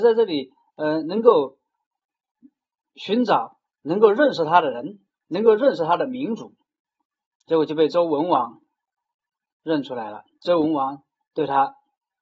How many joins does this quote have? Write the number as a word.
zero